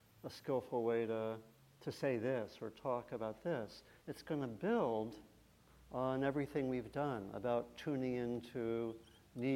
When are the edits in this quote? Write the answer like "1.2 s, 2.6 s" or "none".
none